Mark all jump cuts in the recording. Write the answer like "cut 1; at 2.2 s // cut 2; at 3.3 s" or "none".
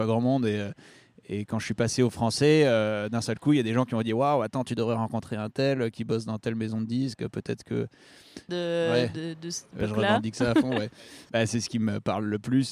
cut 1; at 8.5 s